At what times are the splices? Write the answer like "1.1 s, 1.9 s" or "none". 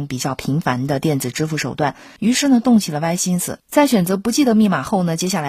2.2 s, 3.6 s